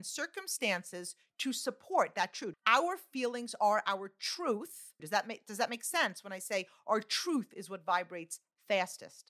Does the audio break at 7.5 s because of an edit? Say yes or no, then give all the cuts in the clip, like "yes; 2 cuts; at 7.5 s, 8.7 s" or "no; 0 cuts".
no; 2 cuts; at 2.5 s, 5.0 s